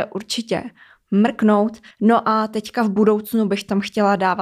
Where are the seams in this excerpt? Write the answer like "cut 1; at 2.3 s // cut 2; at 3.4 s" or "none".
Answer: cut 1; at 1.9 s